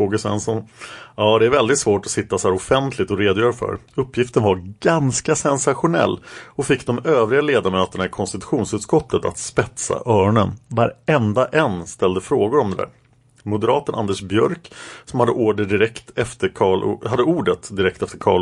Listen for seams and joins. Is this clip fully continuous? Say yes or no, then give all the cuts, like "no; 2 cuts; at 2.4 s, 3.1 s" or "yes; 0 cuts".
no; 1 cut; at 3.9 s